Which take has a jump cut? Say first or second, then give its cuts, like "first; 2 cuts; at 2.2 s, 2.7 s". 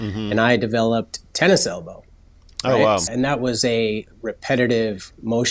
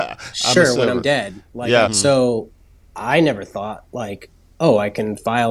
second; 1 cut; at 1.9 s